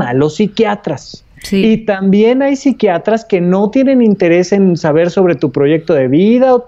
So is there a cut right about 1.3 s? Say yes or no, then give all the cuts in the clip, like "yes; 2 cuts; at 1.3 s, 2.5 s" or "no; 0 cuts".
no; 0 cuts